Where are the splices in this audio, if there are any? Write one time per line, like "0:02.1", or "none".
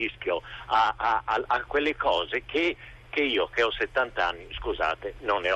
0:01.5